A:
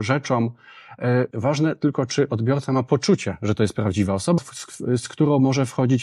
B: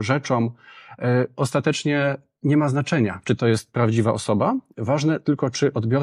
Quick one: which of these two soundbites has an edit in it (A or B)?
A